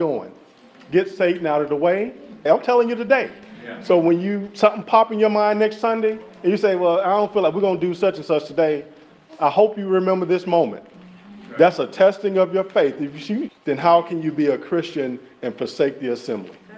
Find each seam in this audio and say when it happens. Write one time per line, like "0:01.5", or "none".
0:02.5
0:13.5